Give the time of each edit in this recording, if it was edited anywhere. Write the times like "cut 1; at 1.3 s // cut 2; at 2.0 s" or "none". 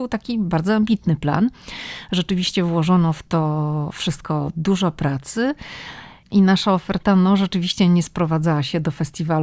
none